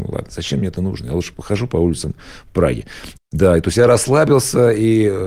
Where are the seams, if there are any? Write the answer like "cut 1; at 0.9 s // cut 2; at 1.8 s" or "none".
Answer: cut 1; at 1.3 s // cut 2; at 3.2 s